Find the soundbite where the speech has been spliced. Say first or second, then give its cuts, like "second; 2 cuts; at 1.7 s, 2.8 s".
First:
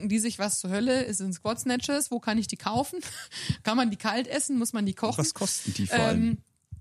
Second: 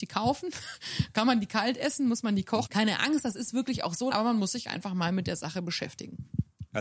second; 2 cuts; at 2.7 s, 4.1 s